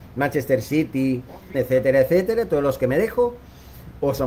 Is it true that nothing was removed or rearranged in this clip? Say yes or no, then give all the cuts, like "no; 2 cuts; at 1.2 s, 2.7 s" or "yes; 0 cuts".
no; 1 cut; at 1.5 s